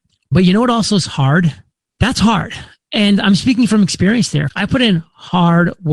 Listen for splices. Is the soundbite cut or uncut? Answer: cut